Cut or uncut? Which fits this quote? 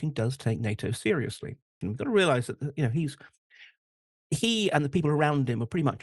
cut